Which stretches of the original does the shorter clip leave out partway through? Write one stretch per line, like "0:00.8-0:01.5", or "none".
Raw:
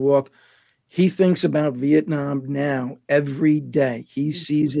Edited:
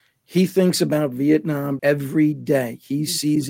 0:02.4-0:03.1

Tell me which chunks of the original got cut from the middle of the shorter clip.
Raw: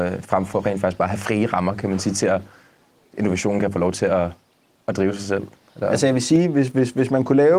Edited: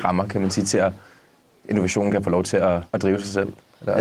0:04.4-0:04.8

